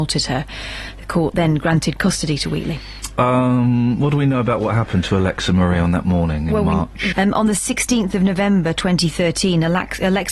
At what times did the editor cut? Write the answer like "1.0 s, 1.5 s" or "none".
7.1 s